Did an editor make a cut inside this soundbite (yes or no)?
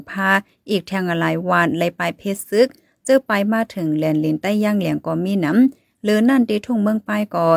no